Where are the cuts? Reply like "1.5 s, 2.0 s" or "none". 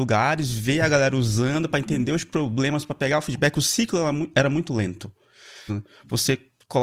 5.7 s